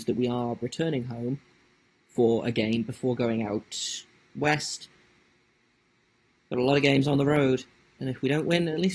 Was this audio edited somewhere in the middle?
no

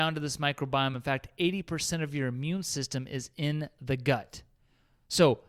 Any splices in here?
no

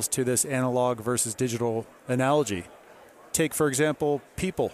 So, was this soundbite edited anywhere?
no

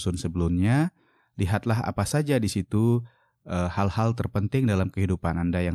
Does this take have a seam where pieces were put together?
no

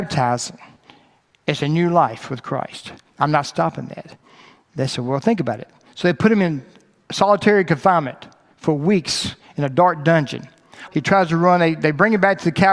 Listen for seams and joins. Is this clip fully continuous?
no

